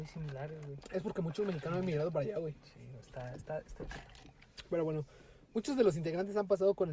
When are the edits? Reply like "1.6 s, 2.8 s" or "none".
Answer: none